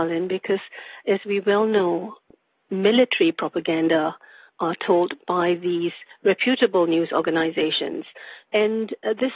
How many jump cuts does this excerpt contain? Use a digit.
2